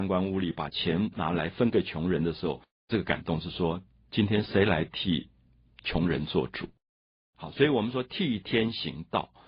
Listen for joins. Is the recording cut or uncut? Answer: cut